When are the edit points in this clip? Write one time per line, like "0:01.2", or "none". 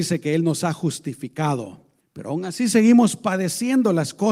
0:02.0